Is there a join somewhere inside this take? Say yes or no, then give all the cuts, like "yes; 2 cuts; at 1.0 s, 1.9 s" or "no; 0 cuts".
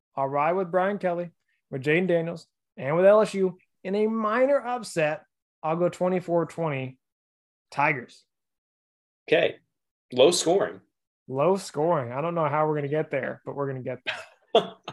no; 0 cuts